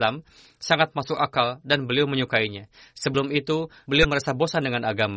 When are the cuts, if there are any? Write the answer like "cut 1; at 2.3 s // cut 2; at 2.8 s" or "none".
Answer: cut 1; at 3.8 s